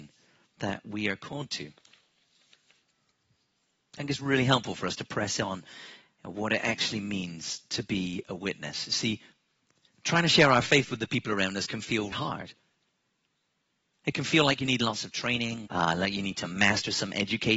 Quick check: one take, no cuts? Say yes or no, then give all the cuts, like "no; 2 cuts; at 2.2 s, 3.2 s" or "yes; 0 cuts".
no; 2 cuts; at 12.1 s, 15.7 s